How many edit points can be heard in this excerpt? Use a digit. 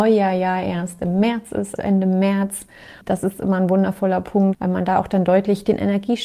2